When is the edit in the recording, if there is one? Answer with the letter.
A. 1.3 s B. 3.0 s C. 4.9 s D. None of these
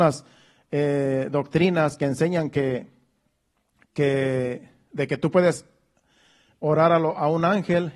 D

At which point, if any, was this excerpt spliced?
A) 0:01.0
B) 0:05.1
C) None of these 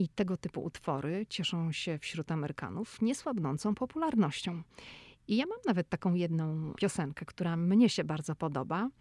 C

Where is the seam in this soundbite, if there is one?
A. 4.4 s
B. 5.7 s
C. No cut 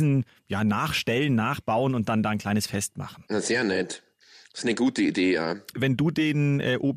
C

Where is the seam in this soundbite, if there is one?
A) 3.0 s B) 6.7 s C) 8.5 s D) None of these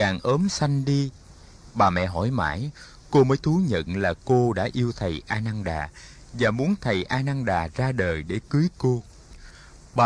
D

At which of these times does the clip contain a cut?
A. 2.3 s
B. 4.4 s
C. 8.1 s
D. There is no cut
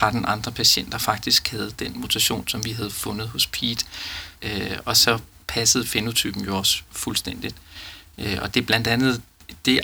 B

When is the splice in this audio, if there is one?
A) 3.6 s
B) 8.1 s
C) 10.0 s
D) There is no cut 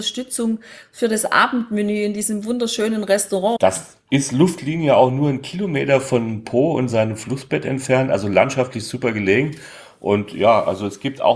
A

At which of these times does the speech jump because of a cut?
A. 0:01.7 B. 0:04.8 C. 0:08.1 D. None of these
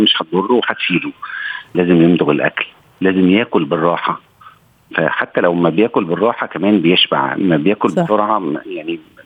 A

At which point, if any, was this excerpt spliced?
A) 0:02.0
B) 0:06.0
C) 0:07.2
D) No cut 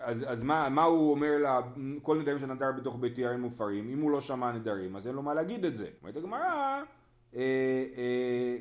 B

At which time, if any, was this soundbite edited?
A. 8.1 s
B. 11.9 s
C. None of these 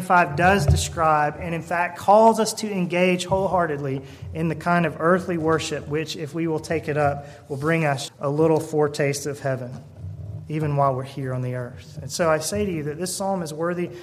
A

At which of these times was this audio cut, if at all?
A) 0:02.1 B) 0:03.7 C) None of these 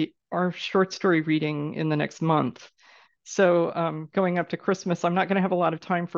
C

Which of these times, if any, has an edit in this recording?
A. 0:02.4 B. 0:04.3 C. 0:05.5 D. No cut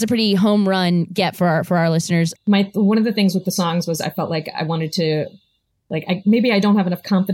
A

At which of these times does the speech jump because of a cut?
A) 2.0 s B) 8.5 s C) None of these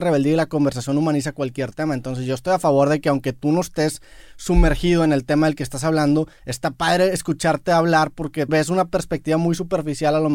B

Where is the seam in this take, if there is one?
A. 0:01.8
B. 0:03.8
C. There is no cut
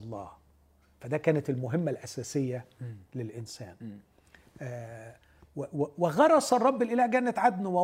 C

